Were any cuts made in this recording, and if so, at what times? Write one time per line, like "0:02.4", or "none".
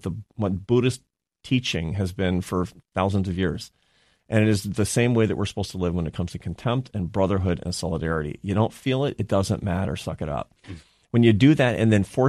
0:10.6